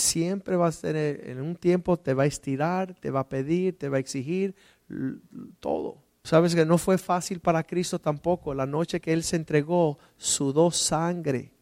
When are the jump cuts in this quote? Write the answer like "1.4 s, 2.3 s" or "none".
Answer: 6.2 s